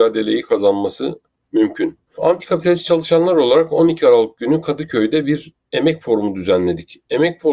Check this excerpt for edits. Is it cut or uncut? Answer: cut